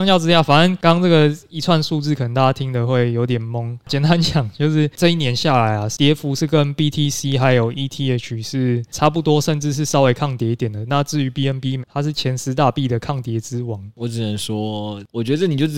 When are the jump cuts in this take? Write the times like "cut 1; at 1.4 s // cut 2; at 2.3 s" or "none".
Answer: cut 1; at 11.8 s